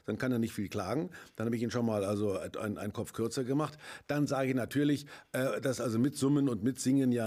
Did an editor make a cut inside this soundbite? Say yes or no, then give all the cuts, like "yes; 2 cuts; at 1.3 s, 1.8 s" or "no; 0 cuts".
no; 0 cuts